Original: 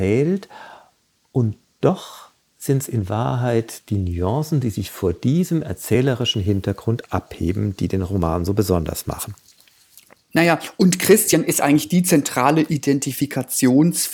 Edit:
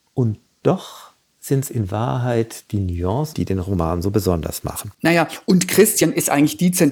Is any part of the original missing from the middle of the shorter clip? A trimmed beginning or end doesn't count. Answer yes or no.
yes